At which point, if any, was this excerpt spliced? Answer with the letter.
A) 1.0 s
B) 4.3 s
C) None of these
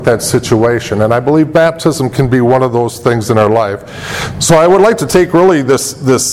C